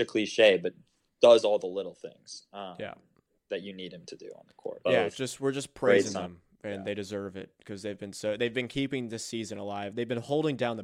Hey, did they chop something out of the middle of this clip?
yes; 1 cut; at 4.9 s

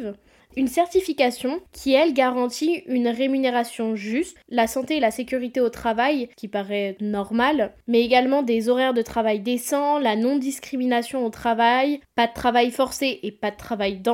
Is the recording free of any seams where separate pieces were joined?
yes; 0 cuts

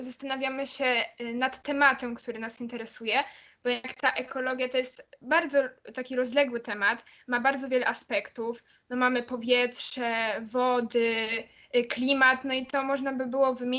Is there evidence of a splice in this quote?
no; 0 cuts

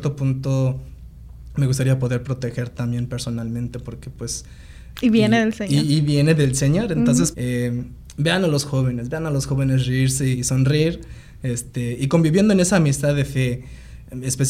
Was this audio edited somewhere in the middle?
yes; 3 cuts; at 4.9 s, 7.3 s, 10.3 s

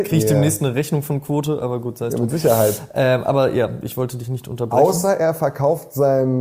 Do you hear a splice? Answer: no; 0 cuts

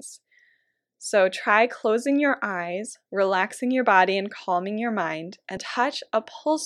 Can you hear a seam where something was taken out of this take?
yes; 1 cut; at 5.6 s

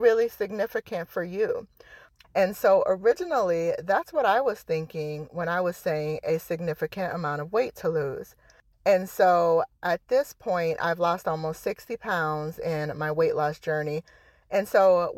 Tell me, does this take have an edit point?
yes; 2 cuts; at 2.2 s, 8.7 s

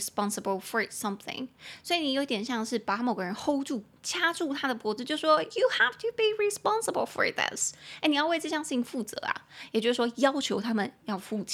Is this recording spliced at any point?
no; 0 cuts

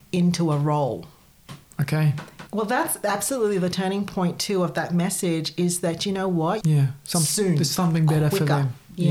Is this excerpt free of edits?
no; 2 cuts; at 2.5 s, 6.6 s

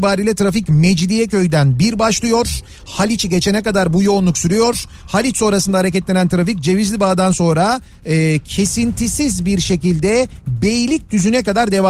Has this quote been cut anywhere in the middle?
no; 0 cuts

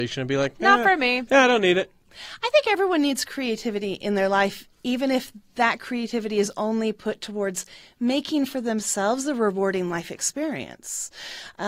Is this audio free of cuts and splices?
yes; 0 cuts

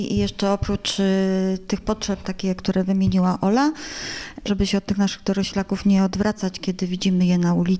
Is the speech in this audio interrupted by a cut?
yes; 2 cuts; at 2.2 s, 4.5 s

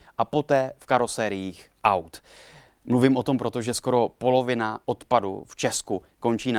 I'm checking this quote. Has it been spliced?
no; 0 cuts

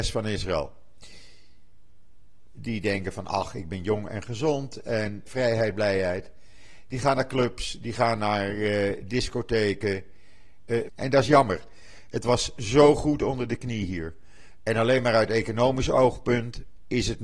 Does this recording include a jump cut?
yes; 3 cuts; at 2.5 s, 5.3 s, 10.9 s

